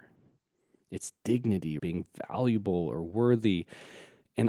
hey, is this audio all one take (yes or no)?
no